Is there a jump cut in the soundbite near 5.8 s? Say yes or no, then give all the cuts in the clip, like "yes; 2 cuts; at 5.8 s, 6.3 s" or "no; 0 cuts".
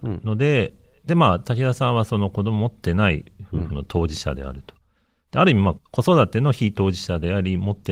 yes; 1 cut; at 5.8 s